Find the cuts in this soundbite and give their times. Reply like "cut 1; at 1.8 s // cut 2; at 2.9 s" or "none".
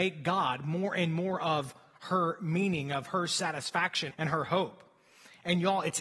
cut 1; at 4.1 s